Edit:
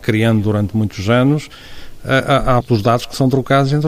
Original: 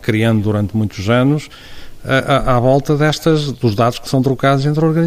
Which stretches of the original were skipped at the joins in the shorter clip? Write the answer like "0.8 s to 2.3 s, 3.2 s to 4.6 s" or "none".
2.6 s to 3.5 s